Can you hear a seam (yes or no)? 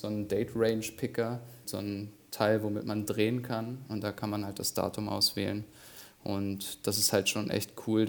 yes